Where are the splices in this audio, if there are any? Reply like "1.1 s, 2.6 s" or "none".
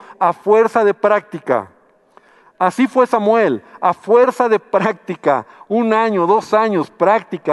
none

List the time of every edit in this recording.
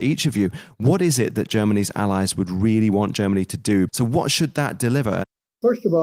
3.9 s

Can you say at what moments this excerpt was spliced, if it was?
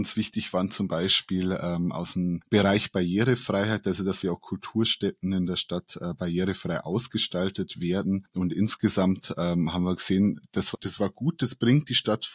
4.2 s, 10.7 s

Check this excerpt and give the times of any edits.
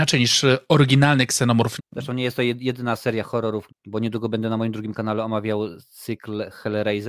1.8 s, 3.7 s

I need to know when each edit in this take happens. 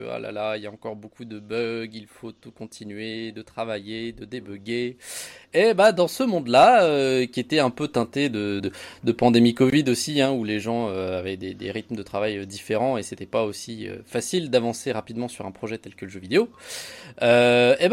8.6 s

